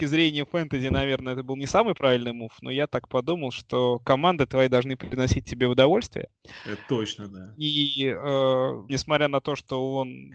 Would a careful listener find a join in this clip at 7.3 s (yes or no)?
yes